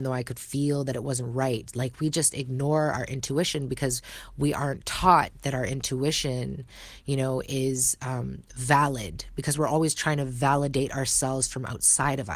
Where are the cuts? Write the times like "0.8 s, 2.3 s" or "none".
none